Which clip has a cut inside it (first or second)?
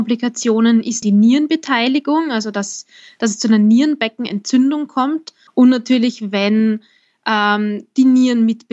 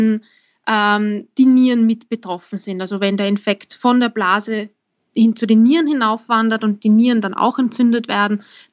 first